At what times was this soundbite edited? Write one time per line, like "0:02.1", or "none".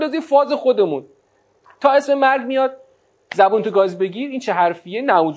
none